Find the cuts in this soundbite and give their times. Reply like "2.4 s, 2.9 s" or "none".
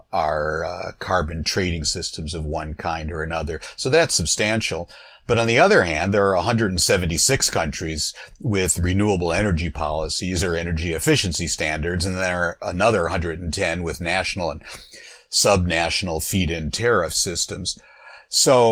none